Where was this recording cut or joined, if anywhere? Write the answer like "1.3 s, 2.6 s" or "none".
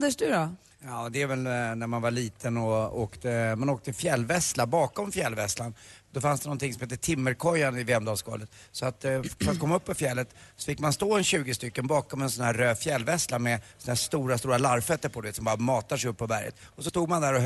none